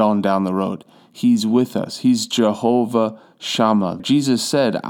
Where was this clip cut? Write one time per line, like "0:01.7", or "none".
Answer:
0:04.0